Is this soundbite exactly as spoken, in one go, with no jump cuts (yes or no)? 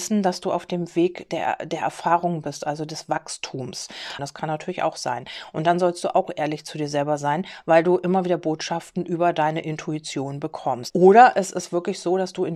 no